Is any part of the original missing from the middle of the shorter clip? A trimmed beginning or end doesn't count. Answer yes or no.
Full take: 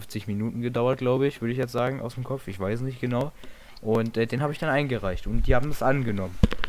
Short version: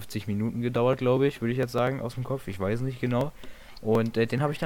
no